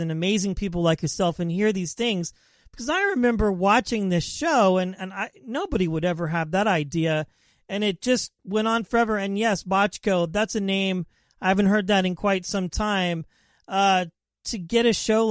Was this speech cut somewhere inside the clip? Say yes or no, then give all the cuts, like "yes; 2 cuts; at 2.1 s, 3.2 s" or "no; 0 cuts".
no; 0 cuts